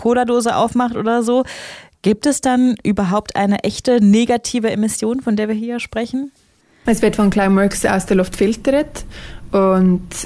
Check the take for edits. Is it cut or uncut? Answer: cut